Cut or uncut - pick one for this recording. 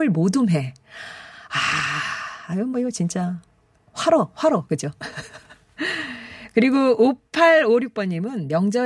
uncut